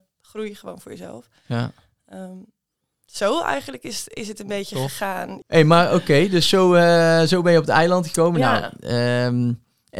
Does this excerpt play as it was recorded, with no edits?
yes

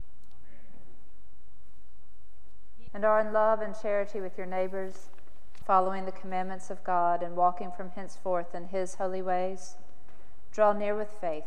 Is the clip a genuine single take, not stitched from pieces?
no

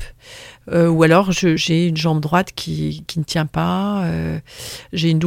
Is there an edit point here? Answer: yes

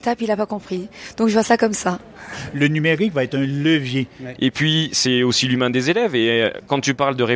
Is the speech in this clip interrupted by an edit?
yes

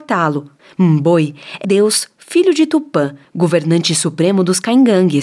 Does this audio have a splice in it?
yes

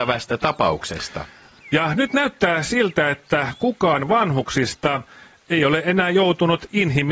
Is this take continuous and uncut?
no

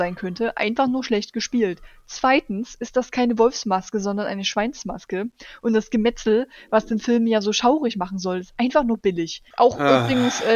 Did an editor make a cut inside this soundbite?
yes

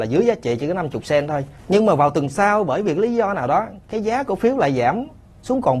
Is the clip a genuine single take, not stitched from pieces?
no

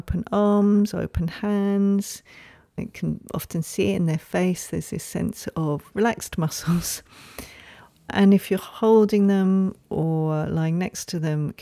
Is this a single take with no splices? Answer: yes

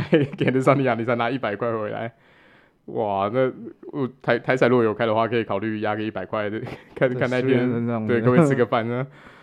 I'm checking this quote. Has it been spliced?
no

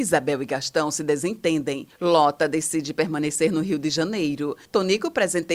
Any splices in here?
no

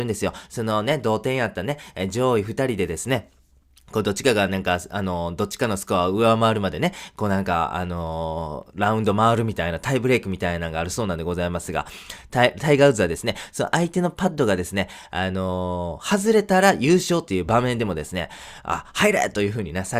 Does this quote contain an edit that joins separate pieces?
no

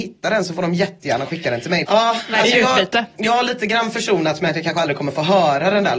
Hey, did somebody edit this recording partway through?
yes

